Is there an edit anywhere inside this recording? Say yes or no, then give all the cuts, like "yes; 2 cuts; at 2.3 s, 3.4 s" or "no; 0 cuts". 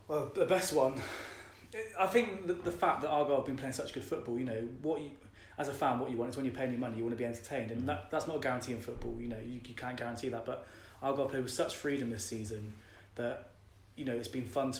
no; 0 cuts